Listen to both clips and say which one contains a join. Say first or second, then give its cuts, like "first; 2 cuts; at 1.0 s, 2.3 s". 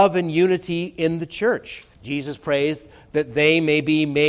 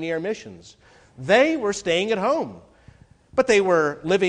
first; 1 cut; at 1.9 s